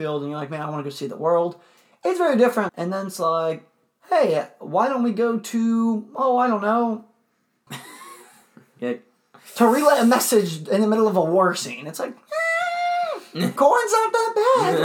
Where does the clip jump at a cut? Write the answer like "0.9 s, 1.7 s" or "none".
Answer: 2.7 s, 7.7 s, 13.6 s